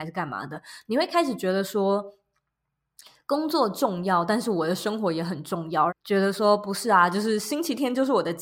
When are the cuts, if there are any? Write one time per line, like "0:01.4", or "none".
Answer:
0:05.9